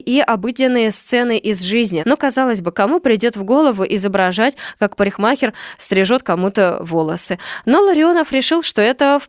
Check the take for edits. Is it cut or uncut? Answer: cut